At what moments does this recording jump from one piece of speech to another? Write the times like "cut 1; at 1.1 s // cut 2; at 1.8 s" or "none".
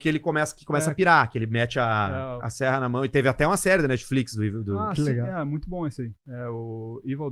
cut 1; at 2.4 s